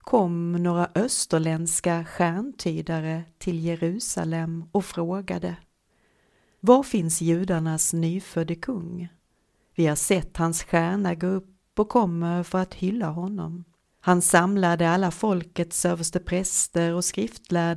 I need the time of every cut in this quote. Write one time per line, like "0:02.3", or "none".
0:13.8